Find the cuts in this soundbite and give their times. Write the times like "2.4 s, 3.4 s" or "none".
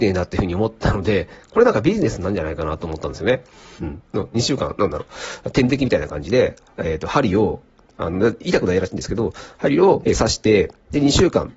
3.8 s, 10.0 s